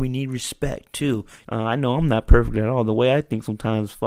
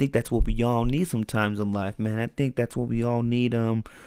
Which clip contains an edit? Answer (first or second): first